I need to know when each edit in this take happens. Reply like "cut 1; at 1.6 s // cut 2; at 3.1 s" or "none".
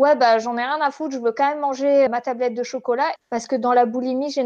cut 1; at 2.1 s // cut 2; at 3.2 s